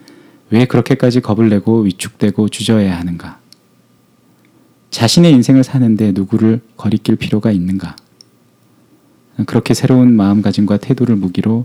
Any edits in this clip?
no; 0 cuts

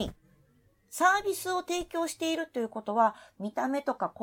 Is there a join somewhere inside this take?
no; 0 cuts

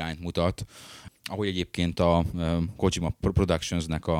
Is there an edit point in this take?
no; 0 cuts

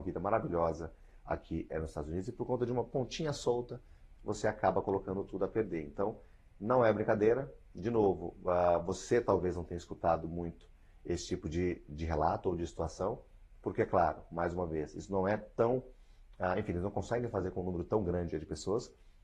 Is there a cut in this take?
yes; 1 cut; at 4.2 s

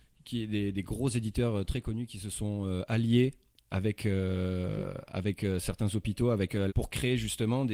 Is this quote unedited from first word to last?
no; 1 cut; at 6.7 s

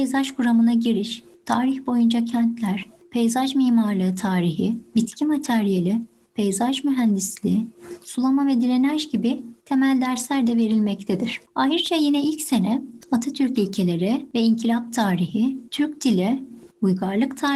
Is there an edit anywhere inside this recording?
no; 0 cuts

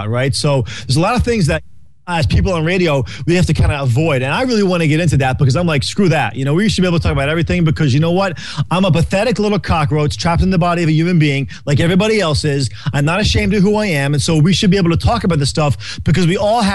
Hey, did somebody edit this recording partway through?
no; 0 cuts

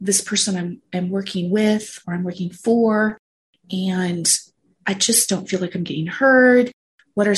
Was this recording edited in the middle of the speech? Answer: no; 0 cuts

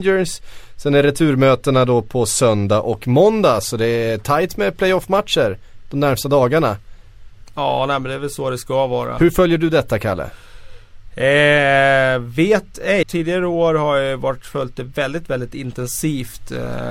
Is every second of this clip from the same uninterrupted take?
no; 1 cut; at 13.0 s

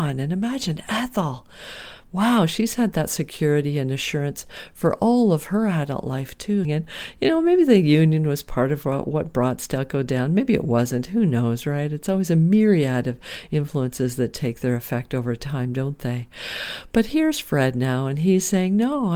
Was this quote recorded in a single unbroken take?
no; 1 cut; at 6.6 s

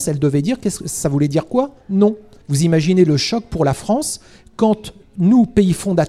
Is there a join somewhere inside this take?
yes; 1 cut; at 2.4 s

